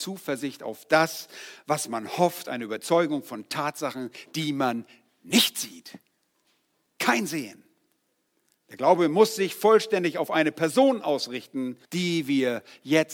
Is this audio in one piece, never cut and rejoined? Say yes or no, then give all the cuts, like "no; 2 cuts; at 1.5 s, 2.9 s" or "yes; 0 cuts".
no; 1 cut; at 11.8 s